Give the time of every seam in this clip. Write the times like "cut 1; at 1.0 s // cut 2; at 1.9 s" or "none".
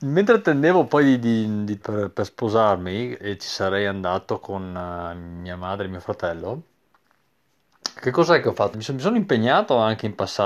cut 1; at 1.8 s // cut 2; at 3.2 s // cut 3; at 8.7 s